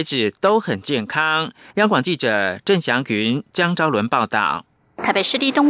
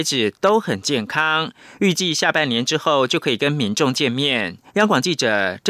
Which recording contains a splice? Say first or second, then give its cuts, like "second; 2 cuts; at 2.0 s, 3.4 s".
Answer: first; 1 cut; at 1.7 s